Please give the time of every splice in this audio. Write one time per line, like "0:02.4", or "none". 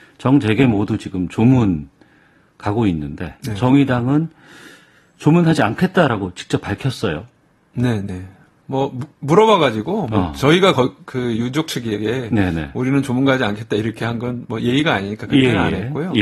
none